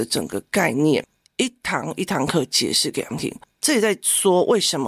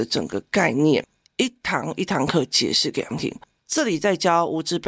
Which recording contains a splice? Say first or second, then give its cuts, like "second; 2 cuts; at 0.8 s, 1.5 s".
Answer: first; 1 cut; at 3.6 s